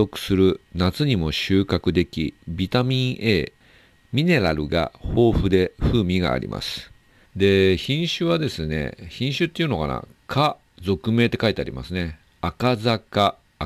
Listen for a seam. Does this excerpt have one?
yes; 1 cut; at 7.2 s

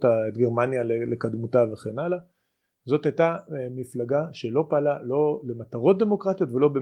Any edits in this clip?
no; 0 cuts

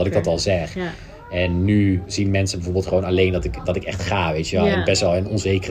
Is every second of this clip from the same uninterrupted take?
yes; 0 cuts

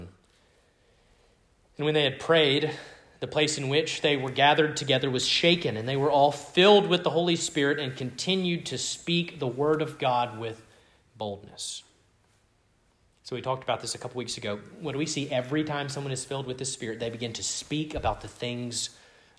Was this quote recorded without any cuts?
yes; 0 cuts

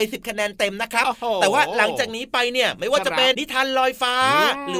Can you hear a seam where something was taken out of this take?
yes; 1 cut; at 3.3 s

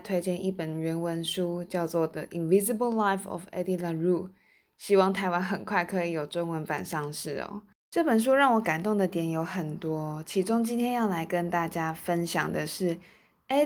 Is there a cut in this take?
yes; 1 cut; at 7.7 s

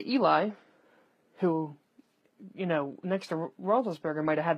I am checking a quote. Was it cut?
no; 0 cuts

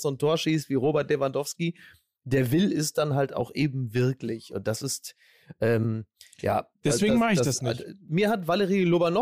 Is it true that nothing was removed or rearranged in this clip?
yes; 0 cuts

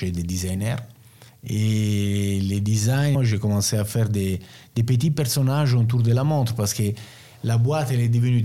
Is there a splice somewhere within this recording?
yes; 2 cuts; at 1.3 s, 3.1 s

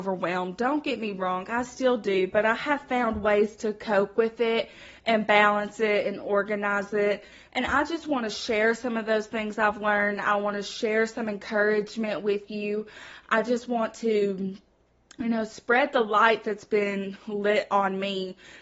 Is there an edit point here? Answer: no; 0 cuts

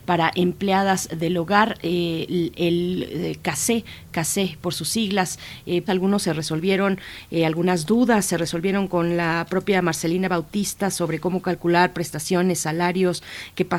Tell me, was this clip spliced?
yes; 1 cut; at 5.9 s

